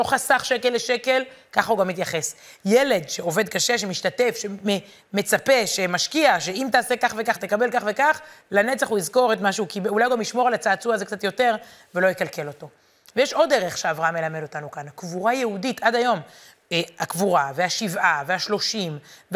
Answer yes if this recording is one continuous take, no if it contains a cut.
yes